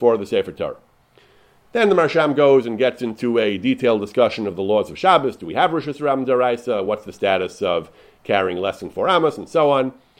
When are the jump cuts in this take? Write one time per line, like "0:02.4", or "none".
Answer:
none